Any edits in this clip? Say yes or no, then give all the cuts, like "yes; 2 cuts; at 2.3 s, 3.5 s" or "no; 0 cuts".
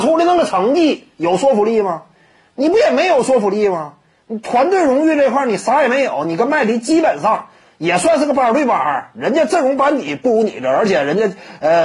no; 0 cuts